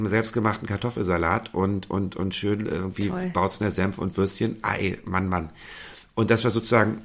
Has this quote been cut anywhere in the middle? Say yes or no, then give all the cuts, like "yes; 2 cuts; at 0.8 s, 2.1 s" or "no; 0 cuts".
no; 0 cuts